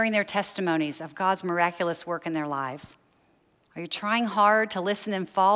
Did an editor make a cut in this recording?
yes; 1 cut; at 3.6 s

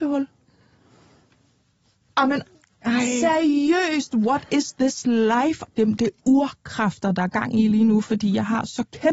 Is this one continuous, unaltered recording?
no; 1 cut; at 5.6 s

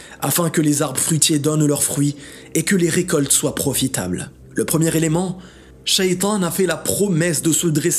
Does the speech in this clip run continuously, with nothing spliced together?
no; 1 cut; at 4.4 s

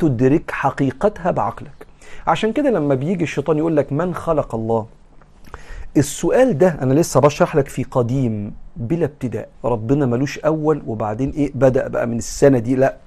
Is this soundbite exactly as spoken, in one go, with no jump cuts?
no; 1 cut; at 9.5 s

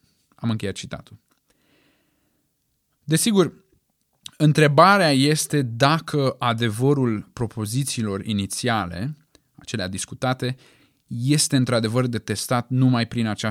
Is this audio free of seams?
yes; 0 cuts

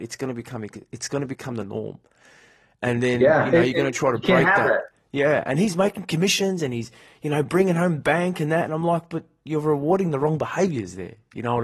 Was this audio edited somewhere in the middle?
no; 0 cuts

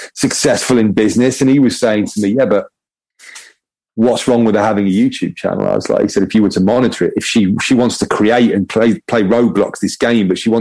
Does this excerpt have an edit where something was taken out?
no; 0 cuts

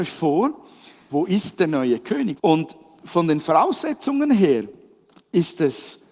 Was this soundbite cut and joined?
yes; 2 cuts; at 1.1 s, 2.4 s

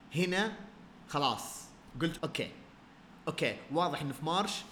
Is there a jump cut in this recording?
yes; 1 cut; at 2.2 s

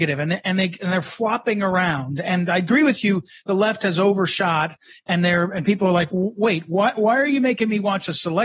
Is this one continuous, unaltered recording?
yes; 0 cuts

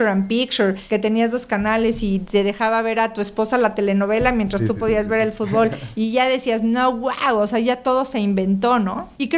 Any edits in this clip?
no; 0 cuts

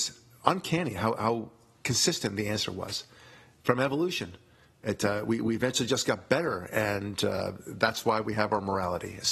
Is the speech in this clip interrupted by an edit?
no; 0 cuts

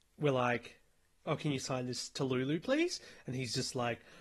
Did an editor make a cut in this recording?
no; 0 cuts

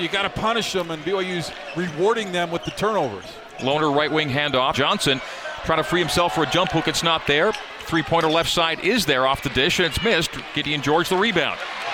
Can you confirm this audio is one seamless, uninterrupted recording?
no; 1 cut; at 4.7 s

